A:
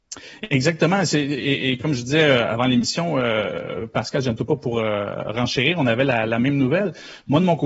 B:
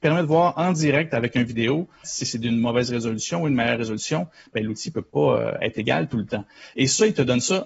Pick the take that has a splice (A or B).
B